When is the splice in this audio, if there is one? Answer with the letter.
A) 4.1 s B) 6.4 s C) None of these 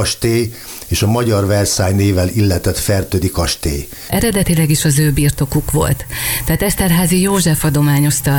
A